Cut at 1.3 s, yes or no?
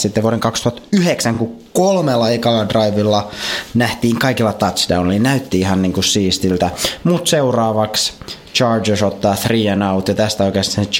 no